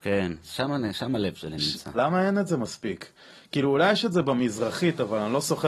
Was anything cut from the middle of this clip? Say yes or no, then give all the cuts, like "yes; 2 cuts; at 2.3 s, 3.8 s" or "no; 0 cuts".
yes; 1 cut; at 1.9 s